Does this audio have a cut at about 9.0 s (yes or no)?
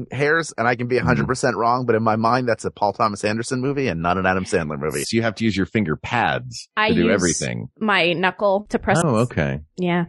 yes